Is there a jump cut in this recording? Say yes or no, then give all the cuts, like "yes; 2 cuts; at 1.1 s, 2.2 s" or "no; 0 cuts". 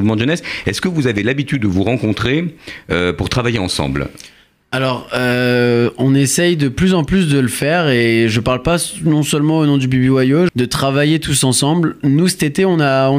yes; 1 cut; at 10.5 s